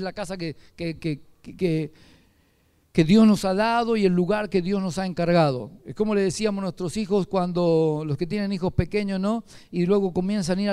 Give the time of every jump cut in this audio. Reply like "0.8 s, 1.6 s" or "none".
none